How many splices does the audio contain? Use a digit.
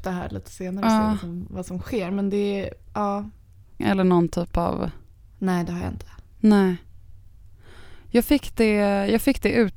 1